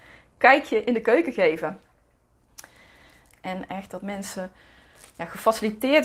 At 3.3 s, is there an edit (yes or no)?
yes